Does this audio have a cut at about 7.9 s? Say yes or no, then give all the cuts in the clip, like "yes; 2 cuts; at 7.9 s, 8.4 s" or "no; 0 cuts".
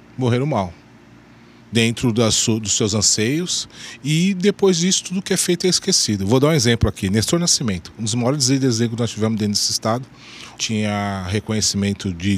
no; 2 cuts; at 1.6 s, 10.5 s